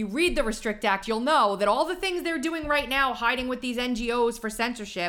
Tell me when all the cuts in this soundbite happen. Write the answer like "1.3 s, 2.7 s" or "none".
none